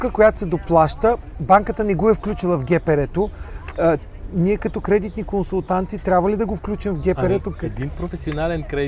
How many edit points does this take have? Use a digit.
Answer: 1